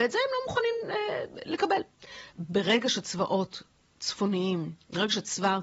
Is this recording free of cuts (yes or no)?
no